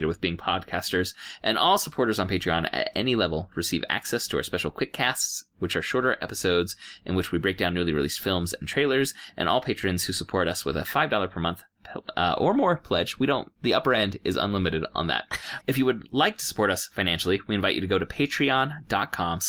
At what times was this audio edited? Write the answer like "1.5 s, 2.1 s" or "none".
13.6 s, 15.6 s

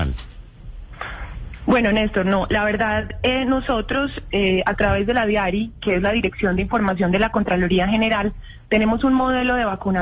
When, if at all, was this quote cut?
none

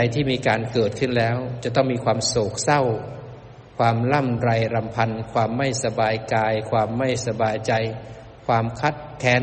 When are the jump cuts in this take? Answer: none

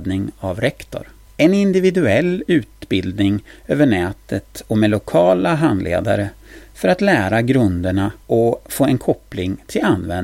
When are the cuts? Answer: 1.3 s, 8.2 s

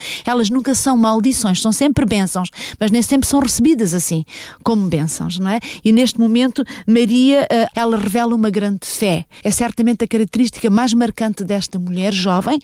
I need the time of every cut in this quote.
7.7 s, 9.4 s

